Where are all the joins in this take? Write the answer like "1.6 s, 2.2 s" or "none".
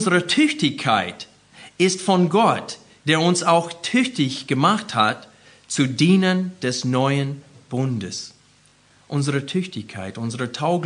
none